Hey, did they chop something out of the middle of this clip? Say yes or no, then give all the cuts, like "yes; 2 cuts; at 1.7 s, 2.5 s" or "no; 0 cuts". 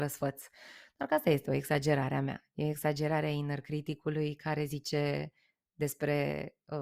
no; 0 cuts